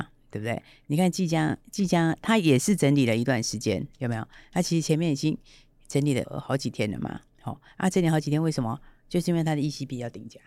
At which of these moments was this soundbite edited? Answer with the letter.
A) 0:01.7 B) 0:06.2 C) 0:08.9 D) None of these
B